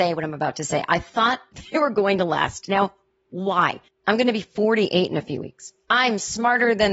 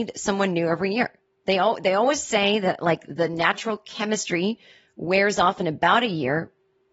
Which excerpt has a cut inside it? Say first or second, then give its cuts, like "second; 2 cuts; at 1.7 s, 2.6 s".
first; 1 cut; at 3.9 s